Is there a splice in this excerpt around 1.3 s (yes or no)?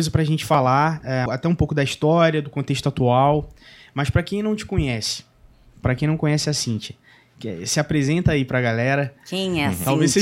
yes